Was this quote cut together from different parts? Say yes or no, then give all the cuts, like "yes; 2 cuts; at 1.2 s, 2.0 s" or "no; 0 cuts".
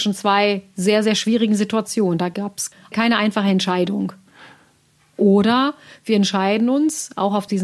yes; 1 cut; at 5.1 s